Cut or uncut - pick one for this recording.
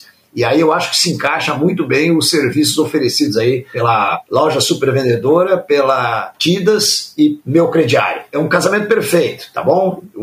uncut